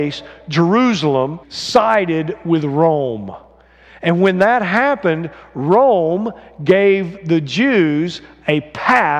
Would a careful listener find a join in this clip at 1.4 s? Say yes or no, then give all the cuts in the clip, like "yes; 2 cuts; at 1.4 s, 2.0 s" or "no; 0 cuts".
yes; 1 cut; at 1.4 s